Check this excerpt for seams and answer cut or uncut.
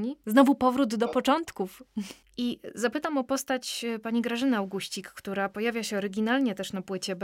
cut